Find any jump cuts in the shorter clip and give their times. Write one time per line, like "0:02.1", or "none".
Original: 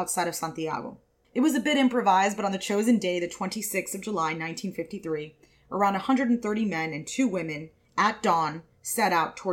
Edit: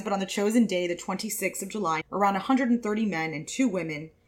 0:02.0